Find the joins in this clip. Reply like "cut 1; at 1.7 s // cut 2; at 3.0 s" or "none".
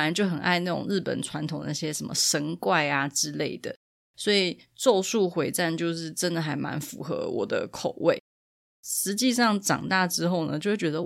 cut 1; at 4.1 s // cut 2; at 8.8 s